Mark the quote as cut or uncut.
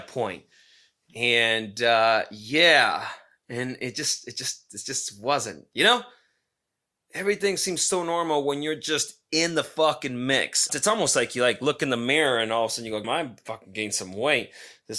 cut